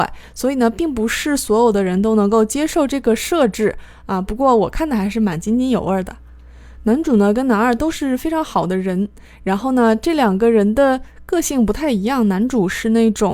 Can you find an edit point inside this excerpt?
no; 0 cuts

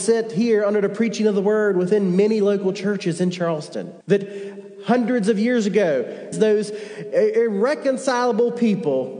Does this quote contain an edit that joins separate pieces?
yes; 2 cuts; at 4.0 s, 6.3 s

